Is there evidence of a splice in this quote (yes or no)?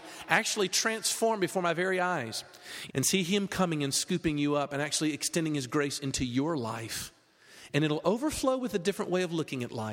yes